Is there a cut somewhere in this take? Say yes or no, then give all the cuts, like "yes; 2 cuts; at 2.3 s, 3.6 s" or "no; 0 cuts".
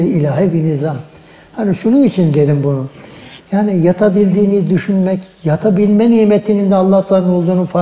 yes; 2 cuts; at 3.4 s, 5.3 s